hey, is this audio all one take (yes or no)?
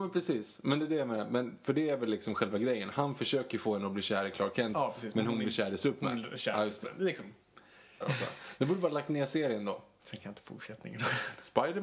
no